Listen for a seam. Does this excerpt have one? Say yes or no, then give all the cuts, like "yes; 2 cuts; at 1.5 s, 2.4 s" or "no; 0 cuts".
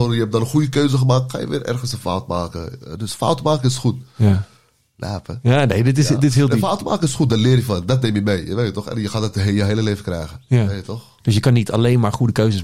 no; 0 cuts